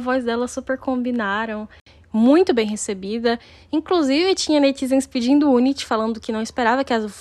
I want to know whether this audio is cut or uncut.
uncut